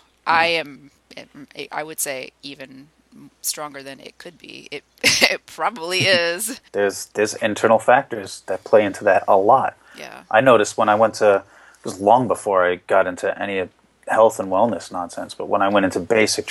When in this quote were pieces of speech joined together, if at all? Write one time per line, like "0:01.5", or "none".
0:06.7